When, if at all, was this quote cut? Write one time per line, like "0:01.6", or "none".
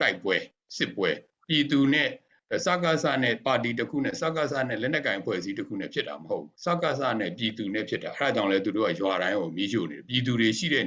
0:06.6